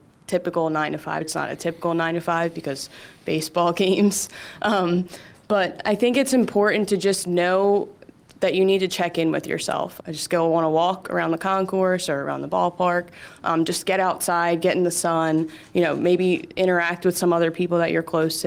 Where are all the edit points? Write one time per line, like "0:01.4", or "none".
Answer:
0:01.2
0:10.0